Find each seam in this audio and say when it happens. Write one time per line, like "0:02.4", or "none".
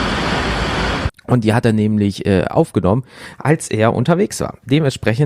0:01.1

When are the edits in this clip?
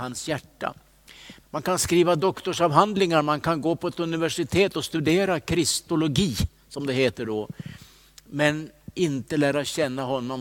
0:01.4

